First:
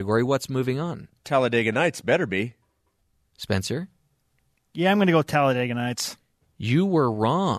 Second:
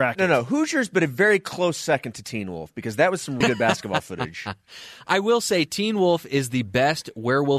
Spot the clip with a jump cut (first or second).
second